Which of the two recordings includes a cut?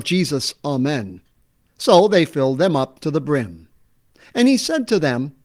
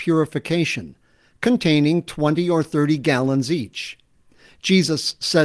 first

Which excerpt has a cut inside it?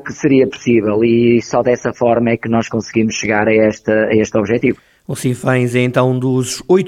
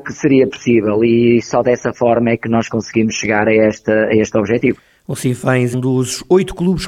second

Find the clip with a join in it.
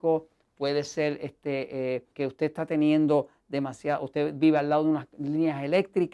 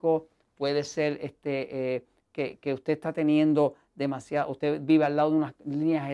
first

